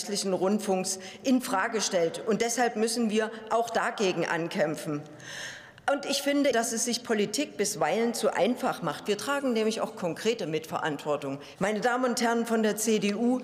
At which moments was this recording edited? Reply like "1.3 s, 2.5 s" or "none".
6.5 s, 11.6 s

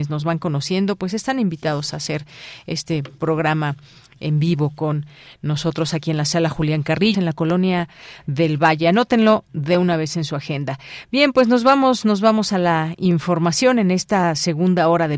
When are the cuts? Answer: 7.1 s

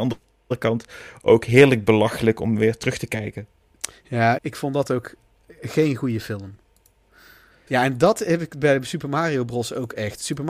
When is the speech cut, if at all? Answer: 4.4 s, 7.7 s

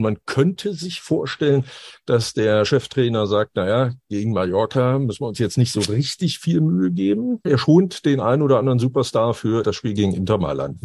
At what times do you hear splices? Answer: 7.4 s, 9.6 s

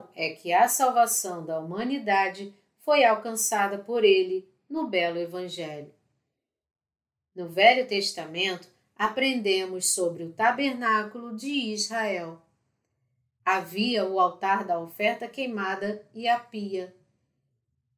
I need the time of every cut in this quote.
none

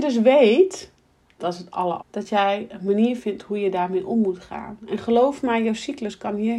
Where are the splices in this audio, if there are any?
2.0 s

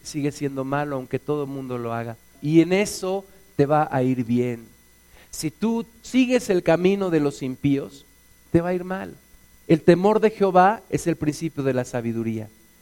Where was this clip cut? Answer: 2.4 s, 9.6 s

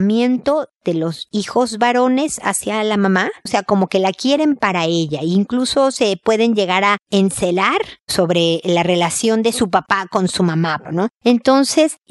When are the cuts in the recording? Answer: 3.5 s, 10.9 s

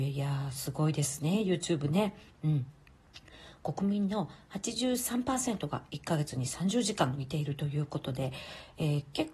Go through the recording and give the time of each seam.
none

